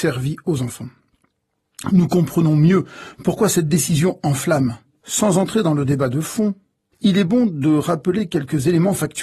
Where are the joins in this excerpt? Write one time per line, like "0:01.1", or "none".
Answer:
0:05.0
0:06.9